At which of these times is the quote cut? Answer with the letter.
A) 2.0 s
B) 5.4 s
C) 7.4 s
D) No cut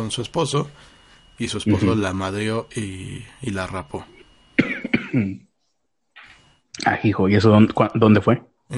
D